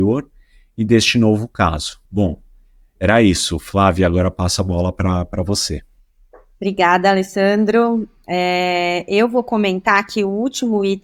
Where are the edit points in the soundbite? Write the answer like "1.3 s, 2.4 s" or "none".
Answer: 2.1 s